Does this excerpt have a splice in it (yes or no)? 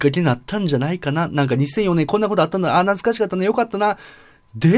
no